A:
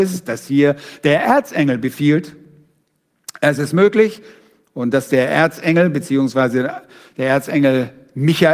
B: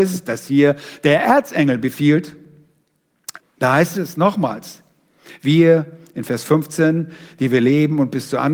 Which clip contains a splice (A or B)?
B